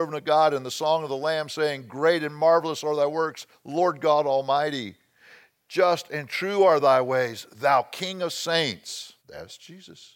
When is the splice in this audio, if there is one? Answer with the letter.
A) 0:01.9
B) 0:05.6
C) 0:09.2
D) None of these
C